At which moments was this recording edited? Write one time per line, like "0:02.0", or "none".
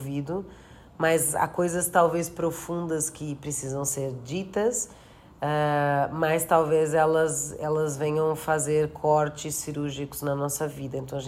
none